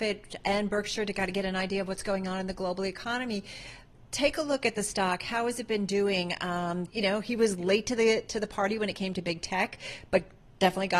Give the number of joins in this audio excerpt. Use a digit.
1